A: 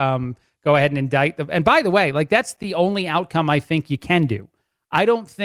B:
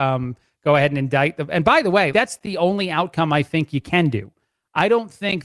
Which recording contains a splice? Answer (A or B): B